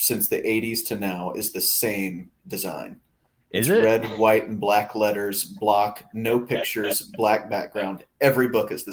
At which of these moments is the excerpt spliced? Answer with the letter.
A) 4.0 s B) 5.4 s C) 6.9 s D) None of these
D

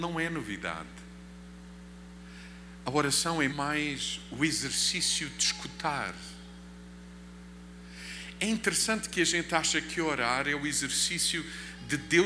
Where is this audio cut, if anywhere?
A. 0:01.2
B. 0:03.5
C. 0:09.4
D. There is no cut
B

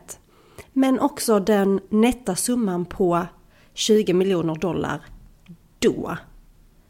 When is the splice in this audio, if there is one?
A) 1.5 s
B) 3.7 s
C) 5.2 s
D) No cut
D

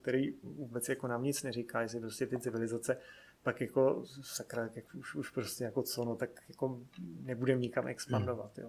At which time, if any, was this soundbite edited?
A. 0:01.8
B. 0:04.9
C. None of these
B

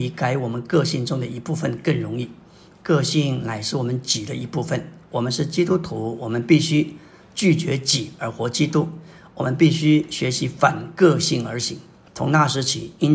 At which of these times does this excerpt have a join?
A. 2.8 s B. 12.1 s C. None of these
B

